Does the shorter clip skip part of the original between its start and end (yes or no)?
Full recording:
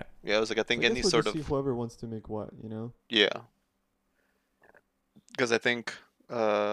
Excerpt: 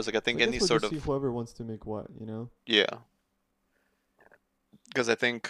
no